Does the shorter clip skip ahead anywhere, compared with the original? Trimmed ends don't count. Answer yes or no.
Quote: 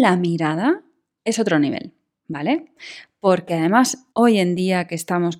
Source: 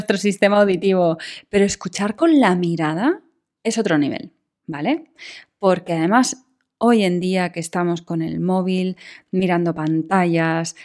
yes